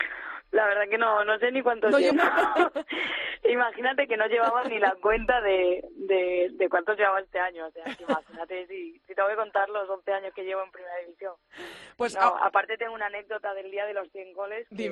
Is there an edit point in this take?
yes; 1 cut; at 2.1 s

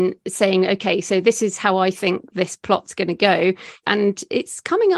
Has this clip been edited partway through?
yes; 1 cut; at 3.8 s

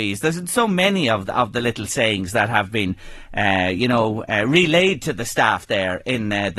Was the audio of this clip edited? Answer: no; 0 cuts

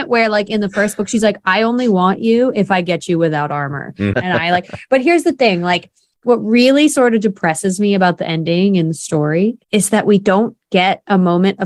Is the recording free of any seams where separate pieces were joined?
no; 2 cuts; at 4.1 s, 9.6 s

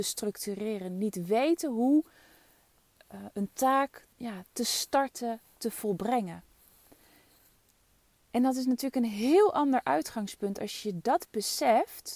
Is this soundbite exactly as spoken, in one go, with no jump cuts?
no; 1 cut; at 4.1 s

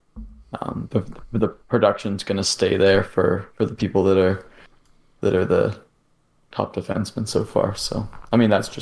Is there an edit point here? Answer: no; 0 cuts

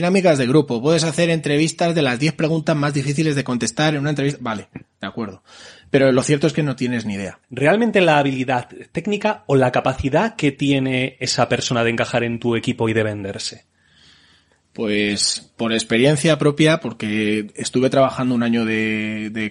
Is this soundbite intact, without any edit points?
no; 1 cut; at 7.4 s

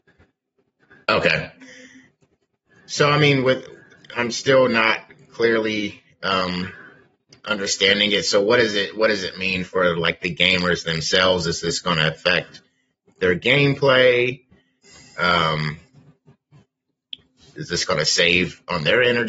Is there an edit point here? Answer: yes; 1 cut; at 4.1 s

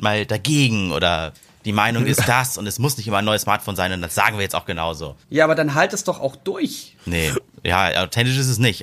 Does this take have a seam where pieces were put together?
yes; 2 cuts; at 5.2 s, 7.0 s

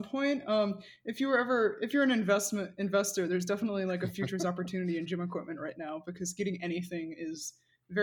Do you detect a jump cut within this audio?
no; 0 cuts

